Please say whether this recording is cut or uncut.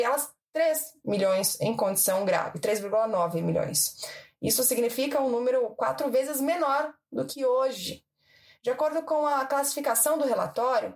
uncut